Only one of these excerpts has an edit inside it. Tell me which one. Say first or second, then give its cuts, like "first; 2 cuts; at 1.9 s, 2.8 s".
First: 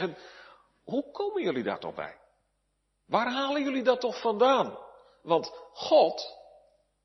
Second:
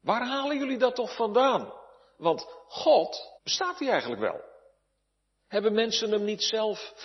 second; 1 cut; at 3.4 s